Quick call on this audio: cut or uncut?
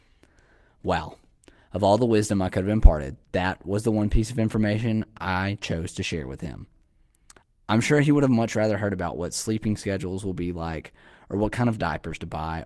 uncut